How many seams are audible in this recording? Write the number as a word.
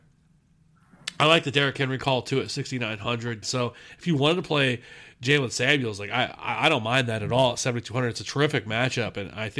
one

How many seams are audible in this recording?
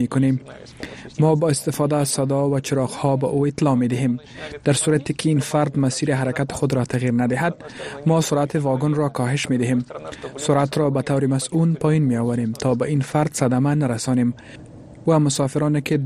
one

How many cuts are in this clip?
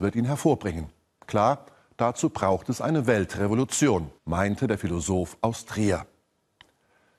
one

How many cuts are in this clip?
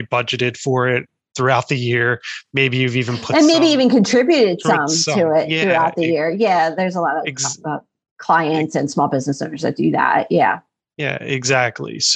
zero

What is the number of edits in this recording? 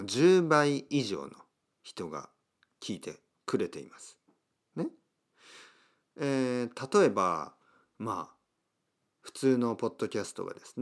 zero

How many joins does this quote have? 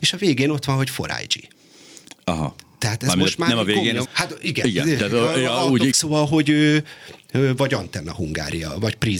two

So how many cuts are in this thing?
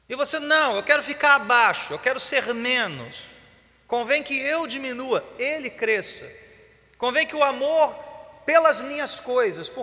zero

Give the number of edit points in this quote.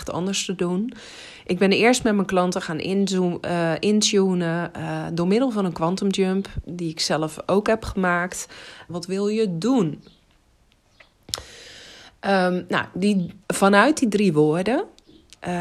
two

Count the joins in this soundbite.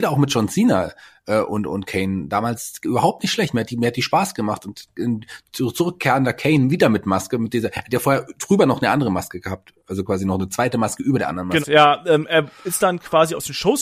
one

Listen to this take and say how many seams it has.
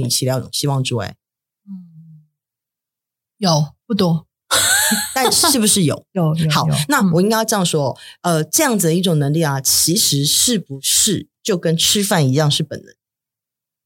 one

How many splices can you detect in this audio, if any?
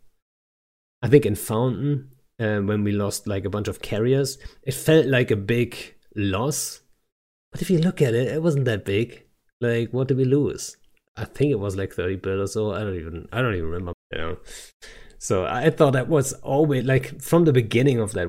one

